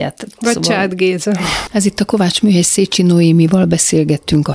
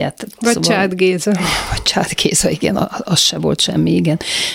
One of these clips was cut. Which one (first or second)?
first